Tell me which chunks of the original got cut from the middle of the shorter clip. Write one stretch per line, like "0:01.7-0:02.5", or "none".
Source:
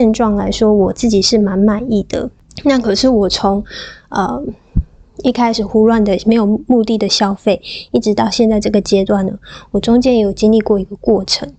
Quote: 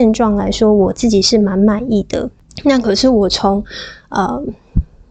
none